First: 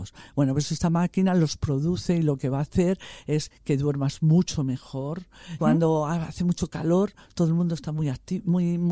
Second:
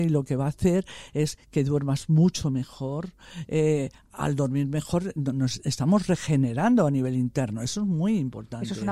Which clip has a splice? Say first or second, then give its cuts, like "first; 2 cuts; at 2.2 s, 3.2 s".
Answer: first; 1 cut; at 5.6 s